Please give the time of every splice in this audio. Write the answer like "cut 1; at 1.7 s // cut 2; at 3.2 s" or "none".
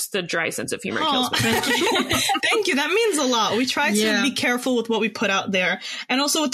none